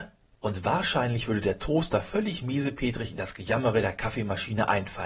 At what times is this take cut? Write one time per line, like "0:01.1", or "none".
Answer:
none